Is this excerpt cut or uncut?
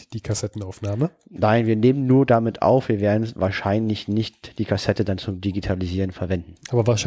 uncut